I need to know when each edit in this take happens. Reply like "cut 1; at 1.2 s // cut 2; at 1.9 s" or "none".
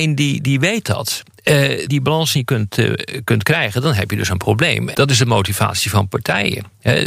cut 1; at 1.9 s // cut 2; at 4.9 s